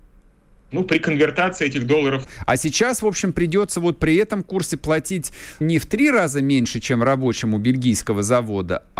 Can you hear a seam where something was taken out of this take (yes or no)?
yes